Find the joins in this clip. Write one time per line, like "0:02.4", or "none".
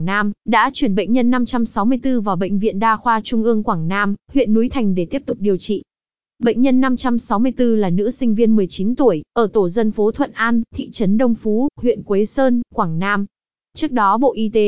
none